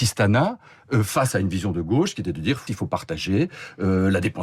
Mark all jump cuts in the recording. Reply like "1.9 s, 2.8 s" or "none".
2.7 s